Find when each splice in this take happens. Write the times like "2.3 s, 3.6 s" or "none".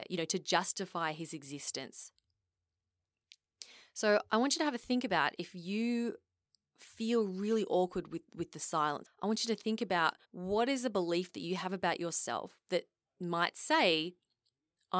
9.0 s, 10.2 s